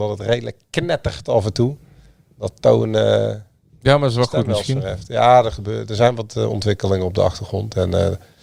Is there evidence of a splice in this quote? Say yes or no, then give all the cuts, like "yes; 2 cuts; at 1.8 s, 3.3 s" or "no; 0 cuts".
no; 0 cuts